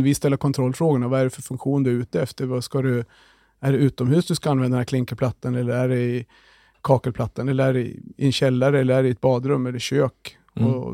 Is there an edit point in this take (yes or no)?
no